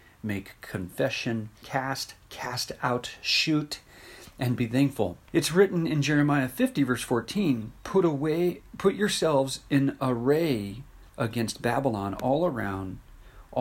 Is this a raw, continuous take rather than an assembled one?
no; 3 cuts; at 1.6 s, 5.3 s, 11.1 s

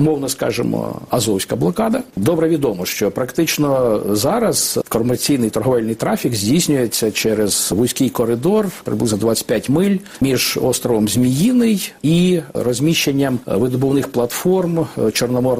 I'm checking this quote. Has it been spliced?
yes; 1 cut; at 2.1 s

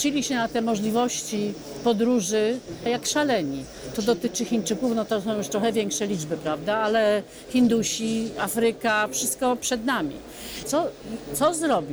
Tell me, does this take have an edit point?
yes; 2 cuts; at 2.9 s, 10.6 s

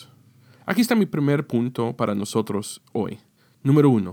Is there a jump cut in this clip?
no; 0 cuts

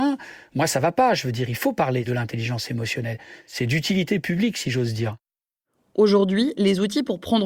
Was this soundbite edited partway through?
no; 0 cuts

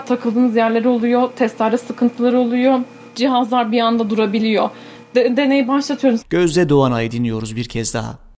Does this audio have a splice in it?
yes; 1 cut; at 6.2 s

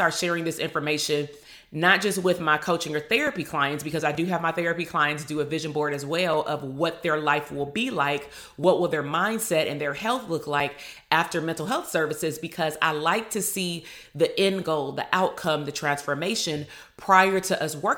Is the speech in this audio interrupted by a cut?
no; 0 cuts

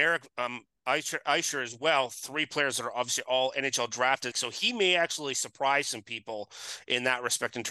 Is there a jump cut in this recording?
yes; 1 cut; at 4.3 s

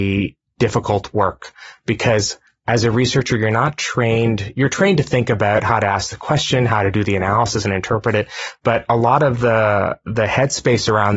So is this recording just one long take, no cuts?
yes; 0 cuts

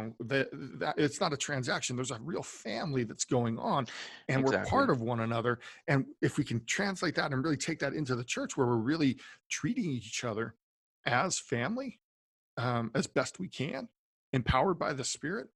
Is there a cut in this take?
no; 0 cuts

